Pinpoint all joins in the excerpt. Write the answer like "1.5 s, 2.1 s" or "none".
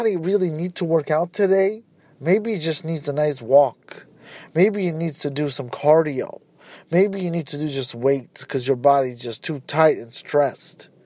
none